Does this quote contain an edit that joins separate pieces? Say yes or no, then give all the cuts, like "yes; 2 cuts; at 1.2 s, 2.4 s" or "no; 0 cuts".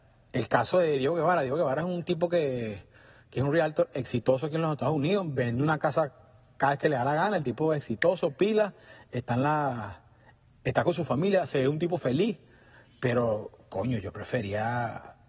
no; 0 cuts